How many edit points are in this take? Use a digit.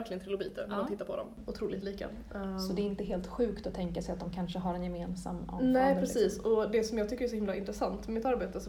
0